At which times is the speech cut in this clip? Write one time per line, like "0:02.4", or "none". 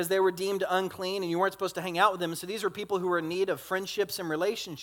none